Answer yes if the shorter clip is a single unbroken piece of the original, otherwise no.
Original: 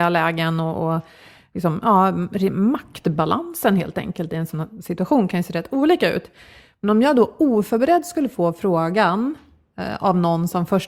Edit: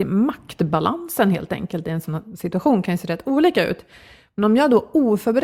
yes